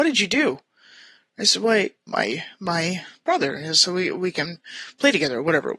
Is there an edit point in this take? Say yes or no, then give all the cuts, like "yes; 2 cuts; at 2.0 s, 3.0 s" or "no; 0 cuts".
yes; 1 cut; at 2.1 s